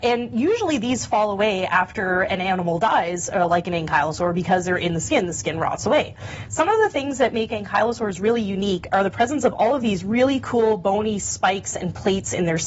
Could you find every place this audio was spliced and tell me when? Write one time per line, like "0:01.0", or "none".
0:06.5